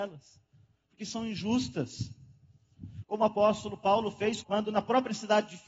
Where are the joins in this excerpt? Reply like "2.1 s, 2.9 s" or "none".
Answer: 3.0 s, 4.4 s